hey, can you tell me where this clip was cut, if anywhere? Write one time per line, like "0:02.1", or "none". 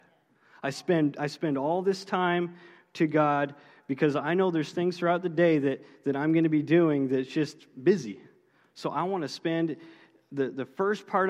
none